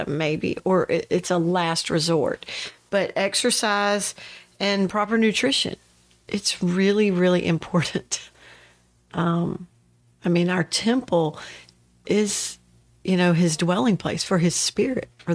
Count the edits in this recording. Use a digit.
0